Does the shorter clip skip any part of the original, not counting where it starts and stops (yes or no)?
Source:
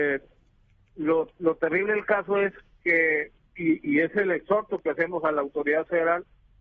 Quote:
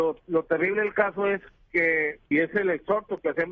yes